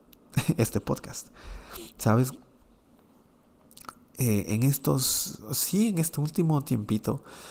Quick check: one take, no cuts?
yes; 0 cuts

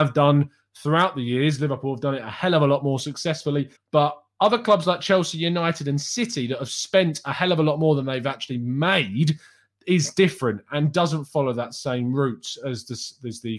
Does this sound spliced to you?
yes; 1 cut; at 3.8 s

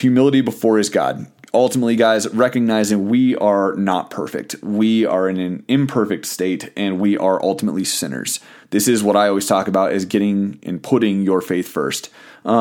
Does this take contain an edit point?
no; 0 cuts

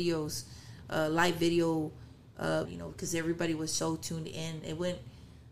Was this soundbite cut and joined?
yes; 2 cuts; at 2.7 s, 3.8 s

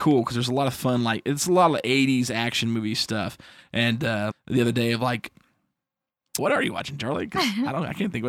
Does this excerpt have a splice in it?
yes; 2 cuts; at 4.3 s, 6.4 s

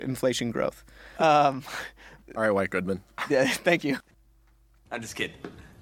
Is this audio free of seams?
no; 1 cut; at 1.1 s

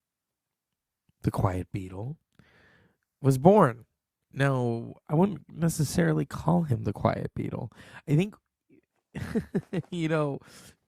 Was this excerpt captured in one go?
yes; 0 cuts

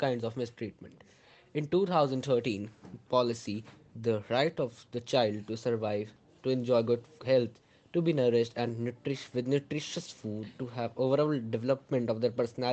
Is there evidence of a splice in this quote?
no; 0 cuts

